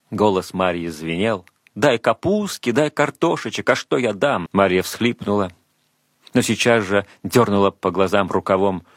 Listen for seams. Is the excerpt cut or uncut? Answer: cut